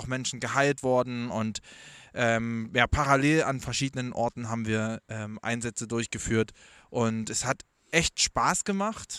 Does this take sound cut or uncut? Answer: uncut